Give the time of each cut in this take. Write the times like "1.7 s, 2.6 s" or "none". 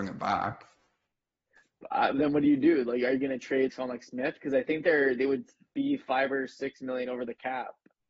3.7 s